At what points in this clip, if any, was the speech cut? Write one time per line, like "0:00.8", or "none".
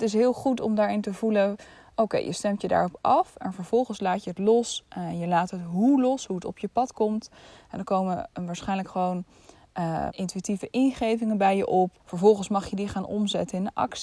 0:10.1
0:12.0